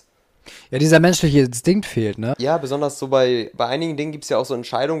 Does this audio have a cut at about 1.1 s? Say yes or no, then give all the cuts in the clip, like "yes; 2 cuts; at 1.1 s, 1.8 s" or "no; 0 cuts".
no; 1 cut; at 2.3 s